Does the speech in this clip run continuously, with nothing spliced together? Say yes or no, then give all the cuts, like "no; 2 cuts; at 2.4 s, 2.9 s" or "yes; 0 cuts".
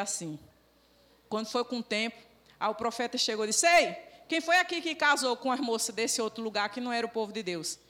yes; 0 cuts